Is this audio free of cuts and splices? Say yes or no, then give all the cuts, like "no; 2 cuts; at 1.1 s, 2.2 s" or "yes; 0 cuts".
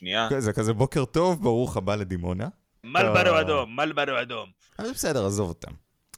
no; 2 cuts; at 2.8 s, 4.7 s